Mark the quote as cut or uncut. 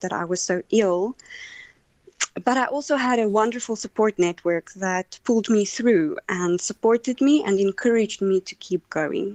uncut